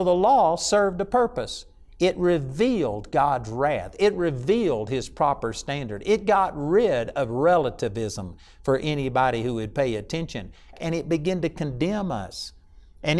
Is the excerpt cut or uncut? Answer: cut